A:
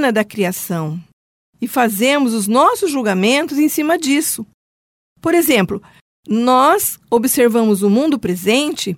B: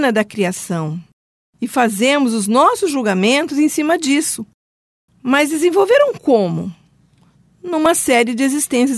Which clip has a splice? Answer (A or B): B